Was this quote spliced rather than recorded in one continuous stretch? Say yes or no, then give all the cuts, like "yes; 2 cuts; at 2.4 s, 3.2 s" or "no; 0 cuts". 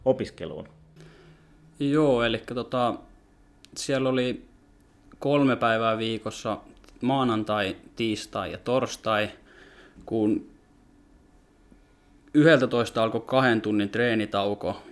no; 0 cuts